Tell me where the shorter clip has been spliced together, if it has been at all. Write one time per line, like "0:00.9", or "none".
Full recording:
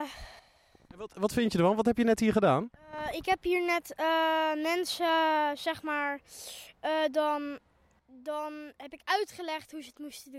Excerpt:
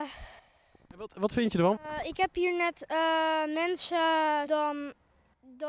0:01.8
0:04.5